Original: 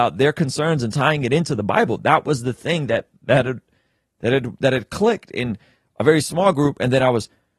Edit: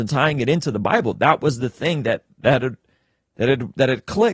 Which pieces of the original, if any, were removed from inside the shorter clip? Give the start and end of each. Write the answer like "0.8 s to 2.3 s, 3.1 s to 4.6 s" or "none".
none